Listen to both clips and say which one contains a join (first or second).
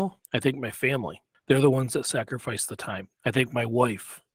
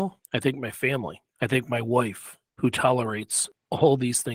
second